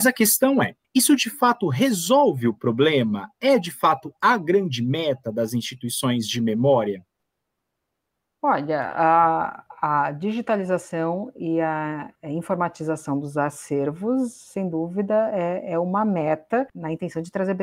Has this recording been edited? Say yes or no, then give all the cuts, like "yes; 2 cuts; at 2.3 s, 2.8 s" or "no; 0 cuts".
no; 0 cuts